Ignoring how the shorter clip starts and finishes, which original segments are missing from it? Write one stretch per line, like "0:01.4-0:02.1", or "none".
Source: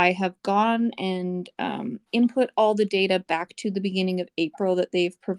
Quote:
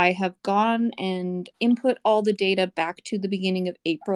0:01.5-0:02.0